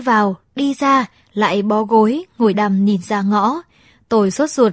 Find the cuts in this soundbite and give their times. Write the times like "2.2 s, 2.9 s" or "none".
2.5 s